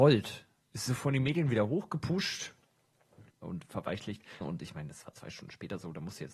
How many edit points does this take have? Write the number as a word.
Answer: two